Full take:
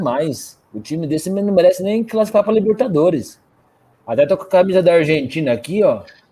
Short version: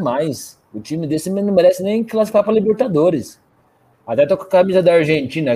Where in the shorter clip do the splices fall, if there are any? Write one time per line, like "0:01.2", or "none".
none

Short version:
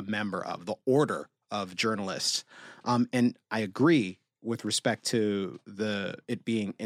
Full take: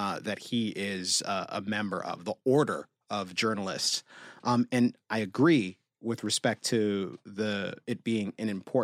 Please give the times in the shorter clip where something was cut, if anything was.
none

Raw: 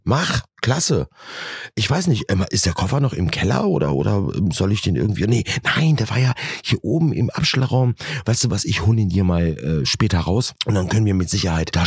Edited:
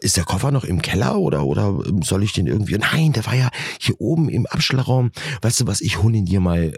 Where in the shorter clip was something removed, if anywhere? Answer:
0:02.8

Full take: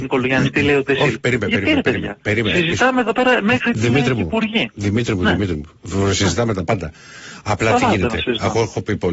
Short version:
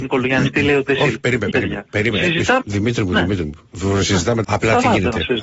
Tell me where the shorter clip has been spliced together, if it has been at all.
0:01.5
0:02.6
0:04.4

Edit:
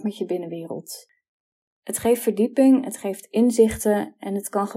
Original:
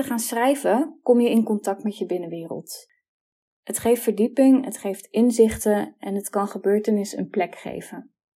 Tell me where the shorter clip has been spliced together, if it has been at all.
none

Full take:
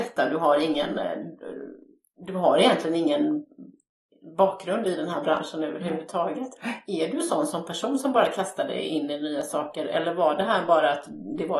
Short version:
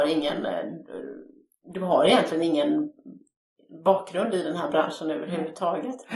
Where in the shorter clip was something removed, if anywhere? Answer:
none

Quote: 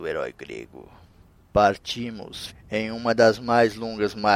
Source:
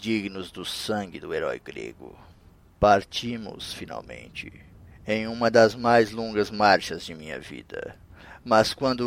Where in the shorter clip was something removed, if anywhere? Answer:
0:02.5

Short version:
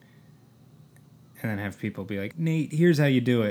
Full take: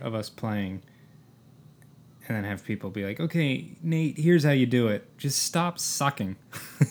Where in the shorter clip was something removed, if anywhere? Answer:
0:02.3

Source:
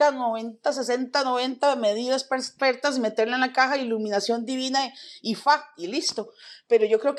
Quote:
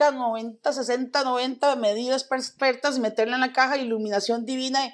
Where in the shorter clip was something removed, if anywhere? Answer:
none

